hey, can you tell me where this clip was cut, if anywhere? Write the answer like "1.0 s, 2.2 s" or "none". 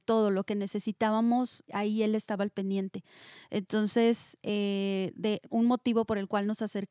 1.7 s, 5.5 s